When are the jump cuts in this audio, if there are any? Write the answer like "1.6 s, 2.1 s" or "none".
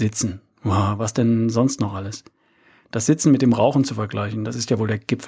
none

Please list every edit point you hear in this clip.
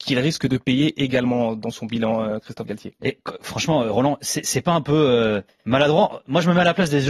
none

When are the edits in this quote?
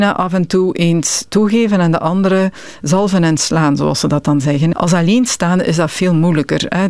4.7 s

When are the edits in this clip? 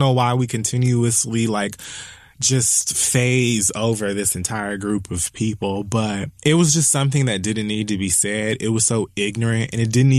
6.4 s

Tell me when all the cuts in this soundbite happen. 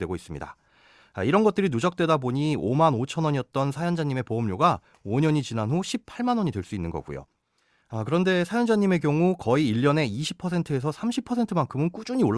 none

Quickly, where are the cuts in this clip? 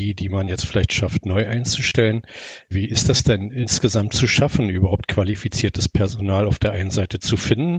none

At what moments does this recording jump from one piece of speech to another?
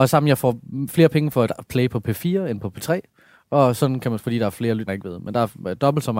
4.9 s

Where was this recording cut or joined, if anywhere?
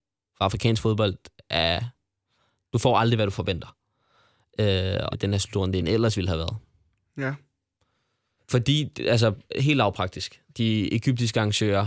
5.1 s, 8.4 s

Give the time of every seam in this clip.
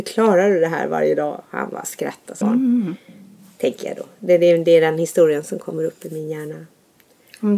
2.4 s

